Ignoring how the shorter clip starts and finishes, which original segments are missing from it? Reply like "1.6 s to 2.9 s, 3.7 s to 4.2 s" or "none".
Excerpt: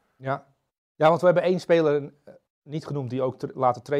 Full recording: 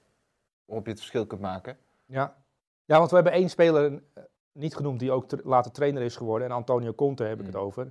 none